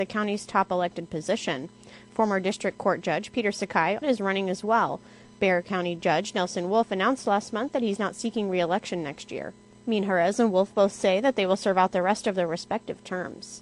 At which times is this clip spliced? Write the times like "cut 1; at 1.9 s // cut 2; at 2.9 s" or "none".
cut 1; at 4.0 s